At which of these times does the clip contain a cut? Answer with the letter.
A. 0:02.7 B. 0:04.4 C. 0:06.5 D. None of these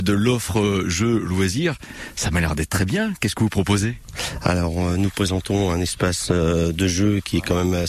A